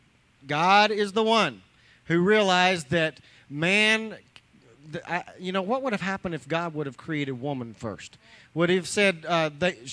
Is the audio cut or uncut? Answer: uncut